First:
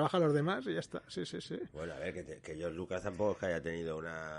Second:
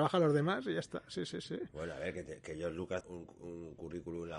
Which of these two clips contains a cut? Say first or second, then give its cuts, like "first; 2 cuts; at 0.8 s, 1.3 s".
second; 1 cut; at 3.0 s